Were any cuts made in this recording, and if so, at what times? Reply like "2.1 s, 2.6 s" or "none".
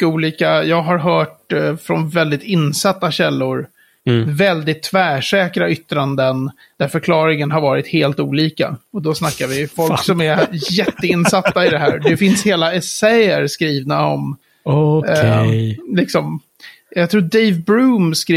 2.1 s